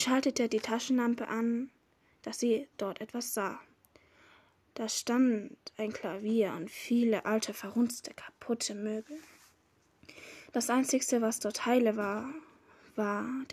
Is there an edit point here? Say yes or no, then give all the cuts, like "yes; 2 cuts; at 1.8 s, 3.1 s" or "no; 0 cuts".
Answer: no; 0 cuts